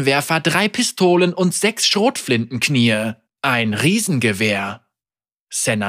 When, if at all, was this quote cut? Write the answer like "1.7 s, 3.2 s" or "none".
3.3 s